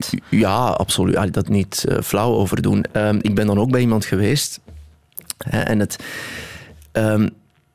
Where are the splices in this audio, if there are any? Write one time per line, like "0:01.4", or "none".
0:01.4
0:05.4